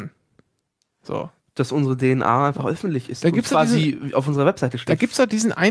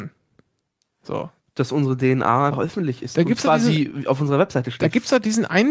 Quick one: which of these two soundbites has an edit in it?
second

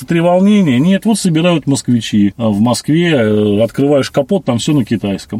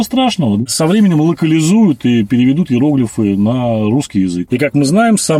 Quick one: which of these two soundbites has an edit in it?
second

